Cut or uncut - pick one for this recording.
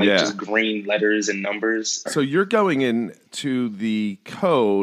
cut